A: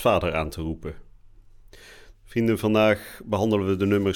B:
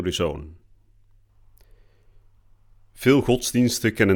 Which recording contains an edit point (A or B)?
A